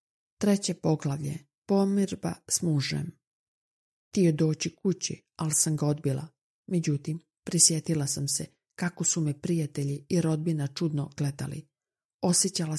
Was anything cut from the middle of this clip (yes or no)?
yes